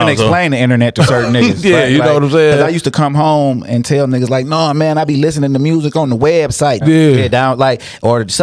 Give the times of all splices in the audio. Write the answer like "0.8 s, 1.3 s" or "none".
6.8 s